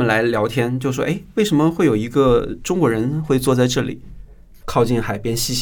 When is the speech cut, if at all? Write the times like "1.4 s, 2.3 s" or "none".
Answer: 4.6 s